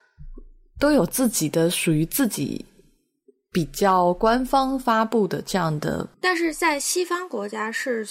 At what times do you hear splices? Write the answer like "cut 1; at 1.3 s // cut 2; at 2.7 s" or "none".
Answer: none